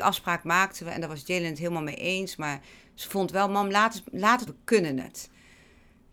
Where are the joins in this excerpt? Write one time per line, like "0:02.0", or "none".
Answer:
0:04.5

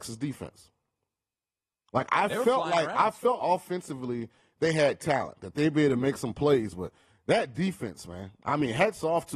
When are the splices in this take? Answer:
0:03.4

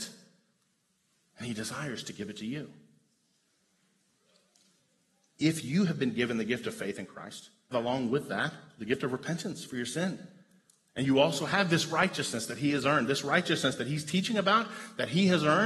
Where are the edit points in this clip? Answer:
0:07.7

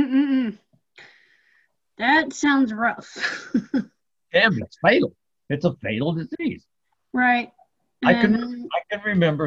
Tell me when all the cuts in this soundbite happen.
0:04.6

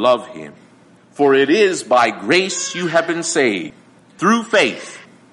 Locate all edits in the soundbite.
0:01.0

